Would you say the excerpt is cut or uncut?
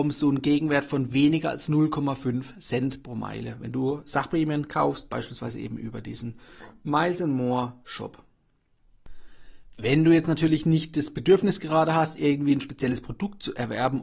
uncut